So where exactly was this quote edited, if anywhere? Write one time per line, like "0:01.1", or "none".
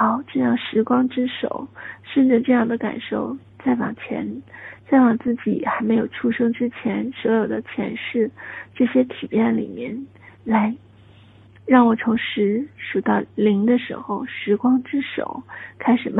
0:10.3